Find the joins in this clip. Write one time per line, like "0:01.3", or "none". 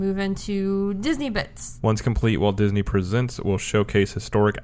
0:01.8